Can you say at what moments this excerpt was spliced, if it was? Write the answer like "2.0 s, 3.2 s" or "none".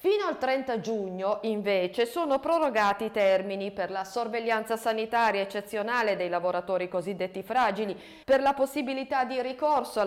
8.2 s